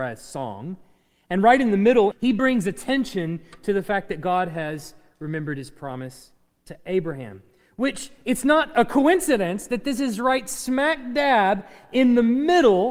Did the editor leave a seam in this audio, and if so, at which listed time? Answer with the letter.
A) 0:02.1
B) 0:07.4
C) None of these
A